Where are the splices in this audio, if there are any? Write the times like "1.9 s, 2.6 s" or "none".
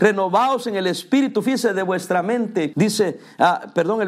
2.7 s